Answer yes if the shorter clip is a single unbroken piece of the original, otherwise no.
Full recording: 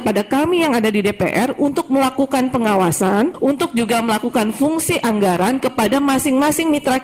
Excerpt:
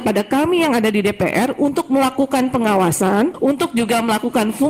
yes